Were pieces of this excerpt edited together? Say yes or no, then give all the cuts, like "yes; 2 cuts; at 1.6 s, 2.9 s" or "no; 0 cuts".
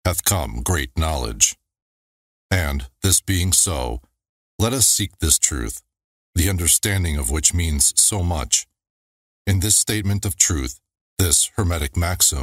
no; 0 cuts